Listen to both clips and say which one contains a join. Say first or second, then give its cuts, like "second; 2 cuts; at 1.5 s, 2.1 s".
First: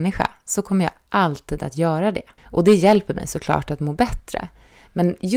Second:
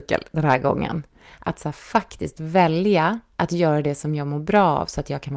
first; 1 cut; at 2.4 s